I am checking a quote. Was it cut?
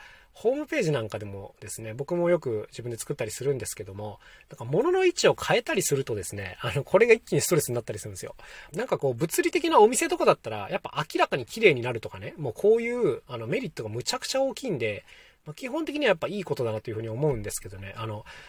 yes; 1 cut; at 8.7 s

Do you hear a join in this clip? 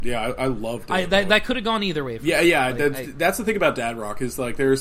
no; 0 cuts

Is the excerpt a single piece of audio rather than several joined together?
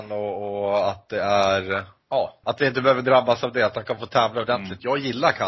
no; 1 cut; at 2.4 s

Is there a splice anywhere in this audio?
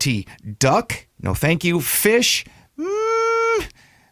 yes; 1 cut; at 1.1 s

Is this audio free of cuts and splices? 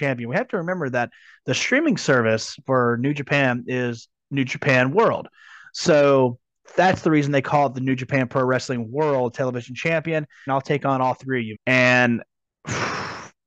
no; 2 cuts; at 10.5 s, 11.5 s

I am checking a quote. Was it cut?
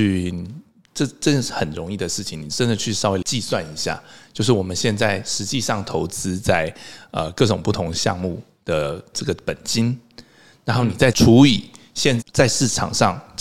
yes; 1 cut; at 12.2 s

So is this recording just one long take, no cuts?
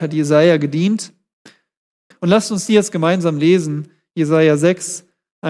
no; 1 cut; at 2.1 s

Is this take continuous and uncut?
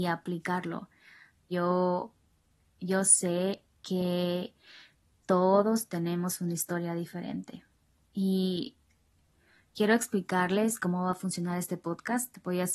no; 1 cut; at 1.5 s

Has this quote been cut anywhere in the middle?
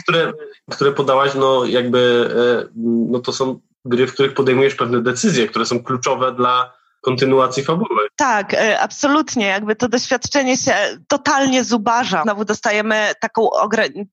yes; 2 cuts; at 11.0 s, 12.2 s

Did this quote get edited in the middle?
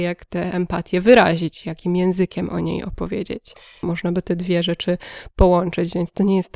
yes; 1 cut; at 3.8 s

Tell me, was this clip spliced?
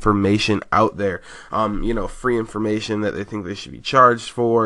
no; 0 cuts

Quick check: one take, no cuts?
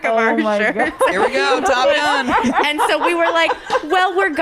no; 1 cut; at 1.1 s

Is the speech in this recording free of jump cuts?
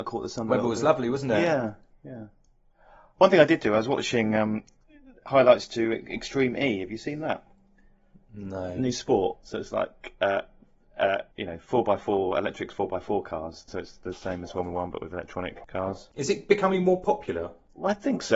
no; 2 cuts; at 11.3 s, 13.7 s

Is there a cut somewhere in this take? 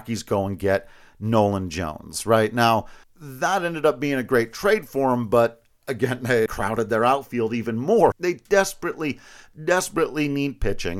yes; 3 cuts; at 3.0 s, 6.5 s, 8.1 s

